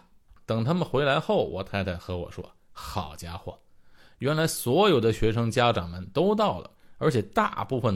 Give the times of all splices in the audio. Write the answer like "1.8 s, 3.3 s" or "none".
none